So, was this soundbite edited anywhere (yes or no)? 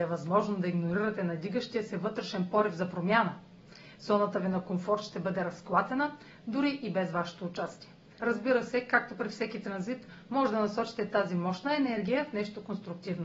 yes